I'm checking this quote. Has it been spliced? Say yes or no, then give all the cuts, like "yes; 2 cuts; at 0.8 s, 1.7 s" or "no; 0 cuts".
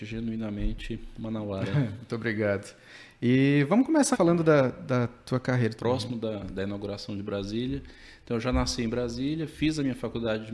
yes; 2 cuts; at 4.1 s, 5.8 s